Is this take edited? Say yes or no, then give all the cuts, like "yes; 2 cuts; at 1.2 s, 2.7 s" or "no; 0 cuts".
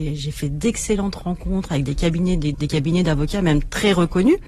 yes; 1 cut; at 2.5 s